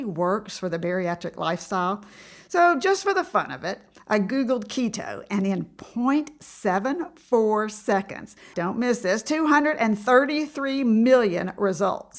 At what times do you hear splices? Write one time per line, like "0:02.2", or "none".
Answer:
0:08.5